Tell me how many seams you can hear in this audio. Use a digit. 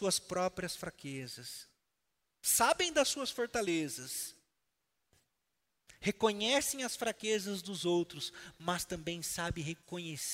0